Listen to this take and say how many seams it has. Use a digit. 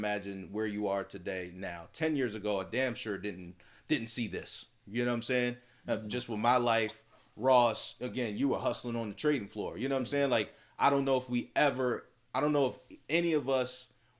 0